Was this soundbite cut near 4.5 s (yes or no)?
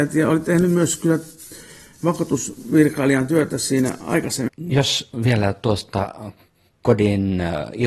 yes